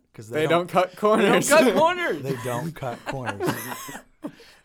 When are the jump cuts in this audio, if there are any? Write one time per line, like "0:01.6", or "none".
none